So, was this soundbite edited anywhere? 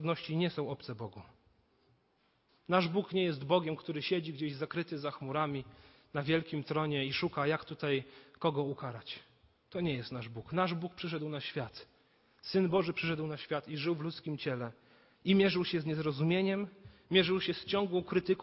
yes; 1 cut; at 2.5 s

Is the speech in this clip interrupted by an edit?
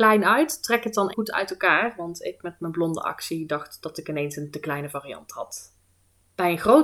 yes; 1 cut; at 1.1 s

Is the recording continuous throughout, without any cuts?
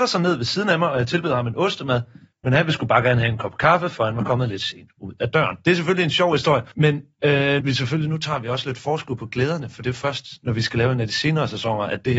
no; 1 cut; at 7.6 s

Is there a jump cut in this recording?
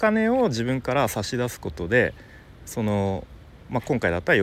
no; 0 cuts

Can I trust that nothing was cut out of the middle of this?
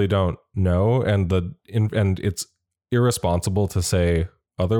yes; 0 cuts

